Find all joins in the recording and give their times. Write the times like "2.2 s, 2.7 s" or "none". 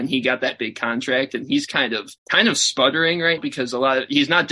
2.2 s, 3.4 s